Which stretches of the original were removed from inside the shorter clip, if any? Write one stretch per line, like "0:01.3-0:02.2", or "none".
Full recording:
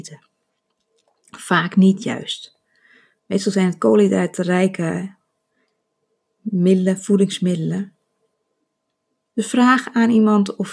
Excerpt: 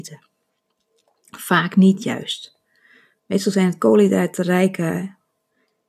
none